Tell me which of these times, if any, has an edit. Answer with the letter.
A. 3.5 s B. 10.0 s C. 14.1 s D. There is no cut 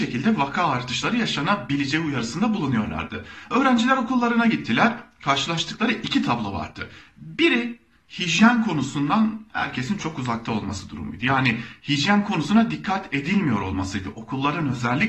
B